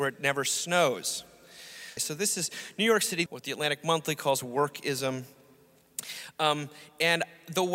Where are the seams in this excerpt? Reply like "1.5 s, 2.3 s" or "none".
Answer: 2.0 s, 3.3 s